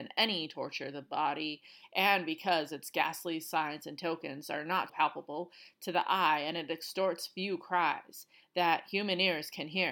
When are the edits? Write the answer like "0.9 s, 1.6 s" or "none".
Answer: 4.9 s